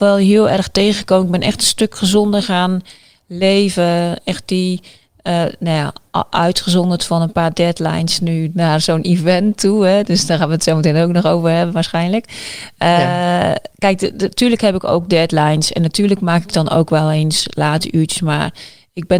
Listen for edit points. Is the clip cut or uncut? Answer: uncut